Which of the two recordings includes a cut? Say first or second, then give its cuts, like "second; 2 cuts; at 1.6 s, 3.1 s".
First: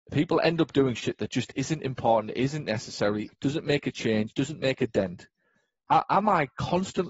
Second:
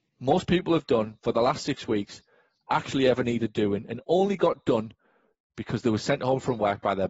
first; 1 cut; at 3.3 s